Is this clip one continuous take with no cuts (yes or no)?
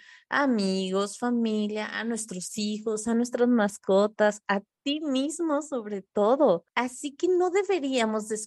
yes